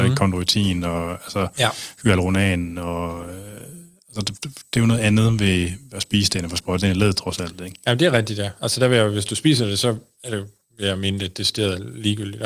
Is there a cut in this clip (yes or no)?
no